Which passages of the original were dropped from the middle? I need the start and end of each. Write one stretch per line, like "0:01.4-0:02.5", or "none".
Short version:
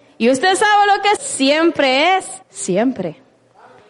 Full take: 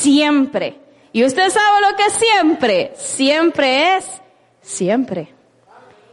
0:02.1-0:03.0
0:04.2-0:04.5